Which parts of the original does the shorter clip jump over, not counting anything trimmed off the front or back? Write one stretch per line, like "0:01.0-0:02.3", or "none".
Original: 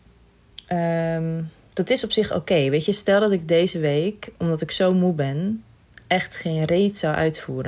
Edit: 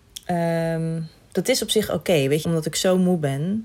0:02.8-0:04.4

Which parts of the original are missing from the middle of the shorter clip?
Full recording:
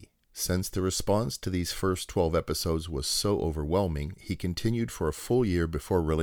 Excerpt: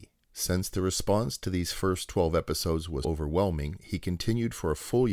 0:03.0-0:03.4

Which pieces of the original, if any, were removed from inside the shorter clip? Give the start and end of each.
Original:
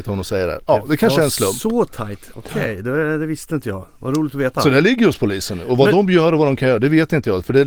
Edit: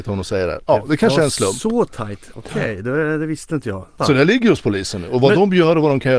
0:04.0-0:04.5

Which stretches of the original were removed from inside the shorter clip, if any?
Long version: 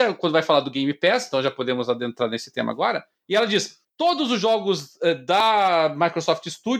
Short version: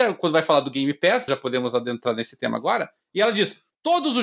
0:01.3-0:01.4

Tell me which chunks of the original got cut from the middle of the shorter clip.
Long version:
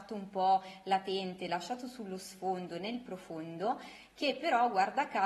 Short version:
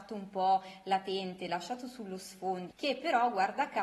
0:02.7-0:04.1

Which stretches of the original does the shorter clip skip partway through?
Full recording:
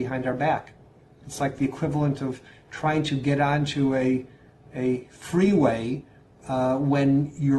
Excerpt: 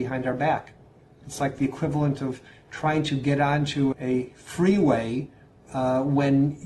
0:03.9-0:04.7

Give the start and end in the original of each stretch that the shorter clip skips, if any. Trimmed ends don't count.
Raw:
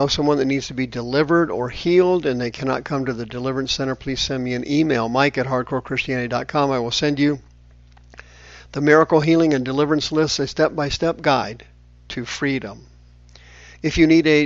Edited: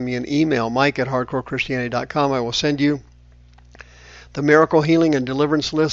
none

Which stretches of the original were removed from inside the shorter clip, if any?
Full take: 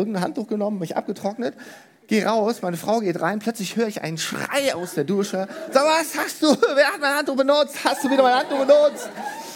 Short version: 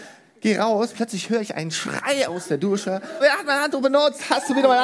0:02.6-0:03.4
0:05.7-0:06.7

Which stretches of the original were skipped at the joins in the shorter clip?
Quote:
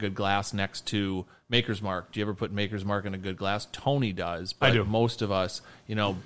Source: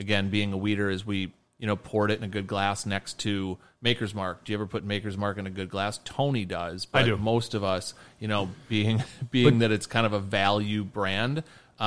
none

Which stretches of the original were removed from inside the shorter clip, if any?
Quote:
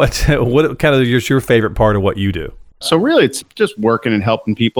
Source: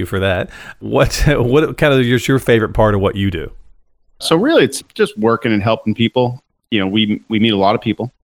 0:03.7-0:04.1

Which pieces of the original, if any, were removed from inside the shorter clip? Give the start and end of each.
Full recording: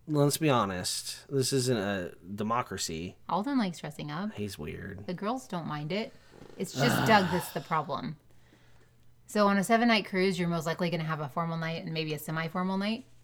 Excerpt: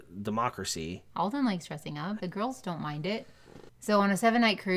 0:04.3-0:05.1
0:06.5-0:09.2

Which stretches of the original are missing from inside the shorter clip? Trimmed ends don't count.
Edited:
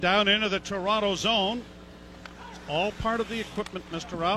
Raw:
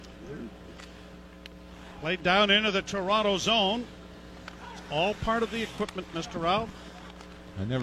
none

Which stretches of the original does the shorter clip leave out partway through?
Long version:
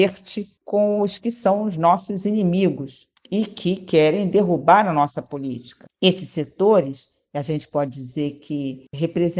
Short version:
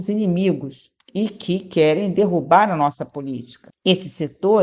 none

